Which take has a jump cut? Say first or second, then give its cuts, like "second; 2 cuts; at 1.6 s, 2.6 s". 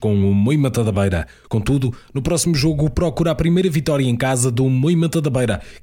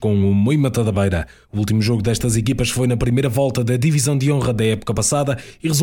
first; 1 cut; at 1.4 s